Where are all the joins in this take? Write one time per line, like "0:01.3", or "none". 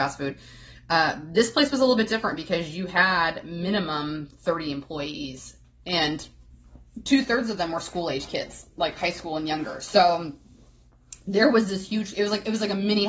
none